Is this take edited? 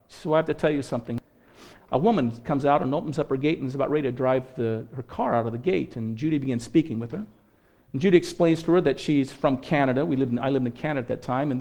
yes; 1 cut; at 1.8 s

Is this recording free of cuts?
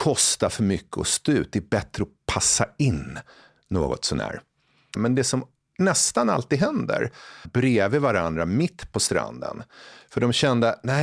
no; 2 cuts; at 4.9 s, 7.4 s

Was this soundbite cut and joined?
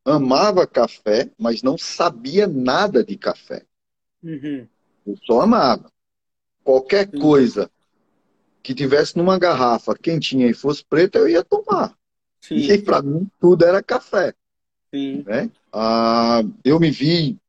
yes; 1 cut; at 15.7 s

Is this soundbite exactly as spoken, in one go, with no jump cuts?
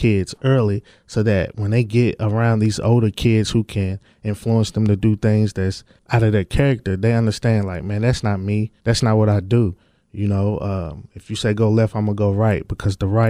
no; 1 cut; at 8.8 s

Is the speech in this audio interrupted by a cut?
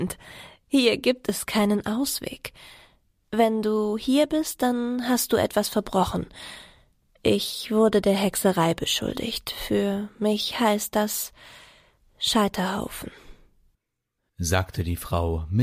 no; 0 cuts

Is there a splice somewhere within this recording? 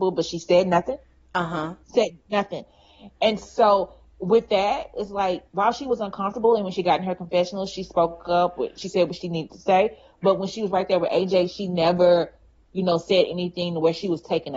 yes; 1 cut; at 1.8 s

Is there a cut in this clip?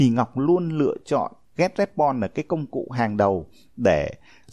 no; 0 cuts

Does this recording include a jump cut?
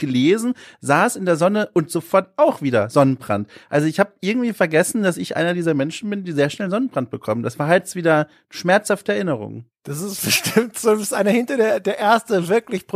no; 0 cuts

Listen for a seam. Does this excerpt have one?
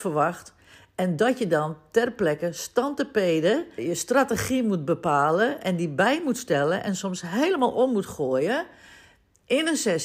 yes; 1 cut; at 3.8 s

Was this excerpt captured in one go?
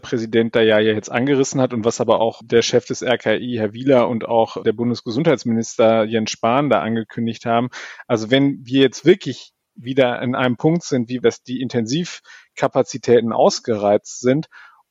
no; 1 cut; at 11.2 s

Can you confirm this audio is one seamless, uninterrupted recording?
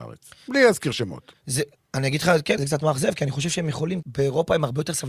no; 2 cuts; at 2.6 s, 4.0 s

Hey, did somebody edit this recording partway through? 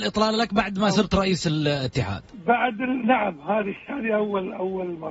no; 0 cuts

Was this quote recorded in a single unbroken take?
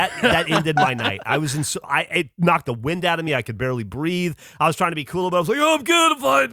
yes; 0 cuts

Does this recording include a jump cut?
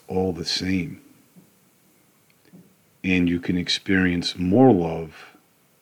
no; 0 cuts

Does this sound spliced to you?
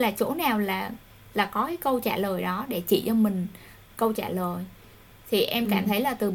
no; 0 cuts

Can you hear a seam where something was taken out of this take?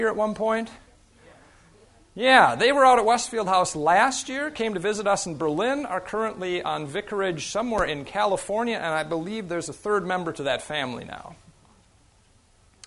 no; 0 cuts

